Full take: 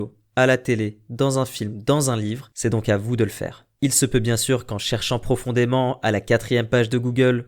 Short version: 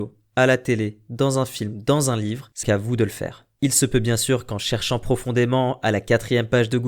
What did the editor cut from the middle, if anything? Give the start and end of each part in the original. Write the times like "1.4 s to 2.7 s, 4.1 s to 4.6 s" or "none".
2.6 s to 2.8 s